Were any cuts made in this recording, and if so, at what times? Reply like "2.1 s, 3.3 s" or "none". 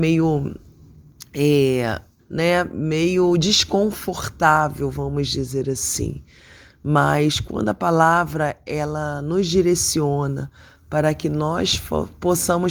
2.2 s